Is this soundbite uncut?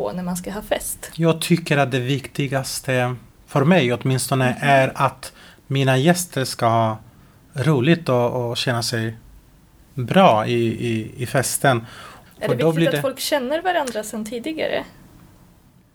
no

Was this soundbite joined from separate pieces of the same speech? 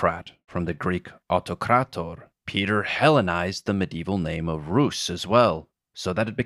yes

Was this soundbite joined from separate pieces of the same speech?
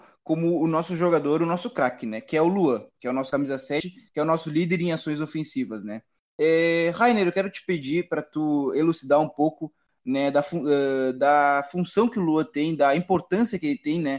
no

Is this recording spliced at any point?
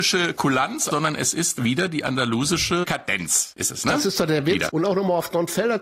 yes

